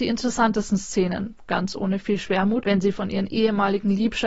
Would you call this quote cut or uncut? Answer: cut